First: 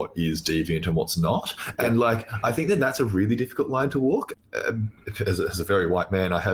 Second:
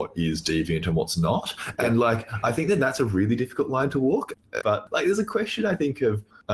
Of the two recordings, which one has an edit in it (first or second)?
second